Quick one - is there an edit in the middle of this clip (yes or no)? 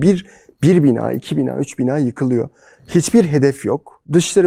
no